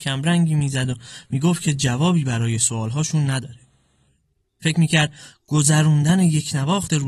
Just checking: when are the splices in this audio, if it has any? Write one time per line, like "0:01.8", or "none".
0:04.5

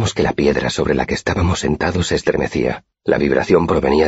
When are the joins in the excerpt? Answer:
0:02.9

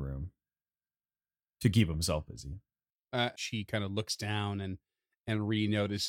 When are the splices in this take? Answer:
0:03.3

